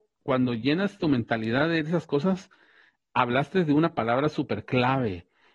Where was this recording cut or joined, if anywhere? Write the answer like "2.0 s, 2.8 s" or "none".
none